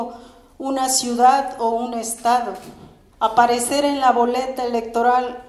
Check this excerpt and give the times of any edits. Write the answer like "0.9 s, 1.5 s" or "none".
3.1 s